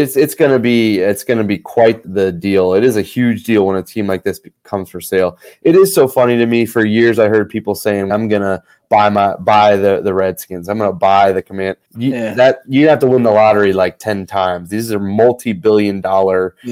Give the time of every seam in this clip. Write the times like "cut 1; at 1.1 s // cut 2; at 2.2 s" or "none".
cut 1; at 2.0 s // cut 2; at 8.1 s // cut 3; at 11.9 s

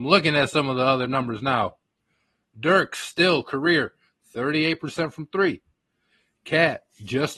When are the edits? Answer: none

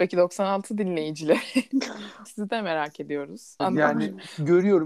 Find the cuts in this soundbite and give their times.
cut 1; at 2.3 s // cut 2; at 3.6 s

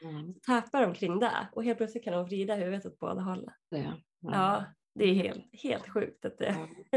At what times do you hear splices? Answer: cut 1; at 3.7 s

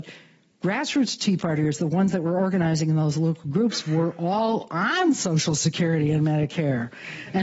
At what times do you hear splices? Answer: none

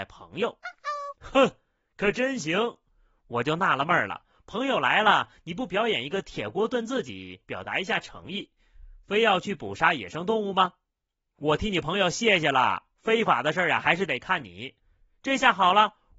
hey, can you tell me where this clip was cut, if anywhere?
none

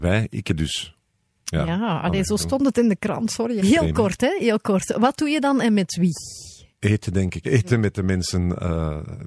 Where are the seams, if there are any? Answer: cut 1; at 3.6 s // cut 2; at 7.4 s

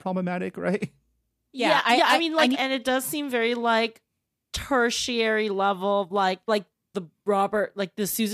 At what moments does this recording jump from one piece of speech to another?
cut 1; at 2.5 s // cut 2; at 6.5 s

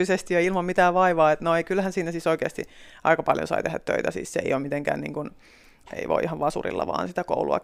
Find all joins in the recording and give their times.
cut 1; at 5.8 s

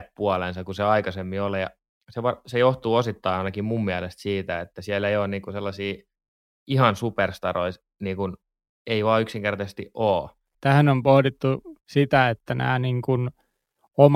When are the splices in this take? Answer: cut 1; at 10.5 s // cut 2; at 11.8 s

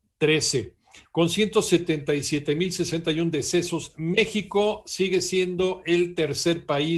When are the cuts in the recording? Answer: cut 1; at 1.0 s

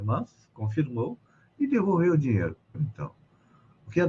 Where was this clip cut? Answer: cut 1; at 2.7 s

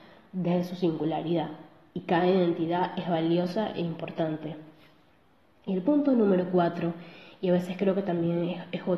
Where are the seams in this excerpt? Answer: none

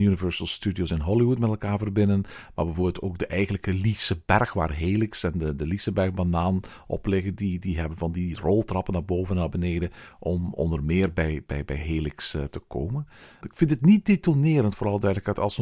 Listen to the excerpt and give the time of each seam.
none

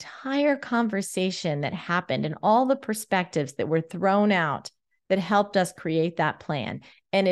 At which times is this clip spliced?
none

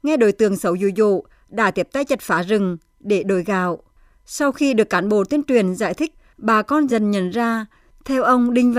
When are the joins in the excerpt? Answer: cut 1; at 6.9 s

